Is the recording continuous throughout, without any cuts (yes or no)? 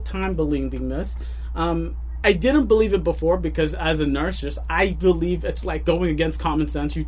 no